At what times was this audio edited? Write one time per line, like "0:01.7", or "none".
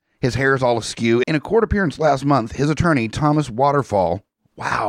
0:01.2